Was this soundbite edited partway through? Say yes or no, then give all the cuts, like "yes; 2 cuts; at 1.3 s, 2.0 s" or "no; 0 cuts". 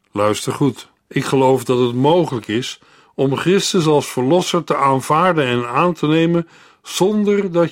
yes; 1 cut; at 1.0 s